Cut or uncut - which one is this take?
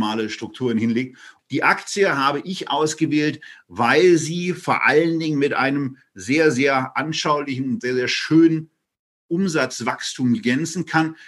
cut